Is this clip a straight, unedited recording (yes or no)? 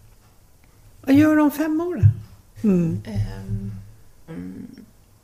no